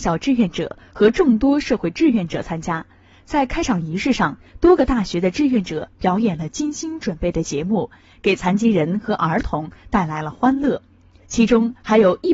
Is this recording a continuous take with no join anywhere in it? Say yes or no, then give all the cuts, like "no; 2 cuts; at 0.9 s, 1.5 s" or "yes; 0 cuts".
yes; 0 cuts